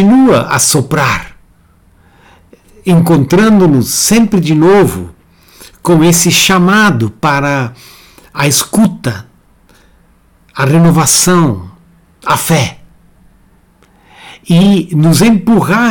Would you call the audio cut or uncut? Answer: uncut